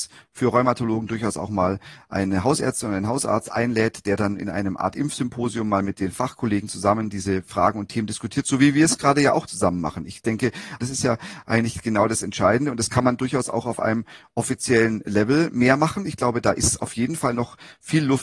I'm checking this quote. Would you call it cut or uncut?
uncut